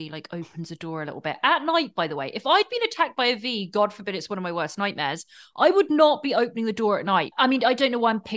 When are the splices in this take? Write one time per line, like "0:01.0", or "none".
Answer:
0:07.3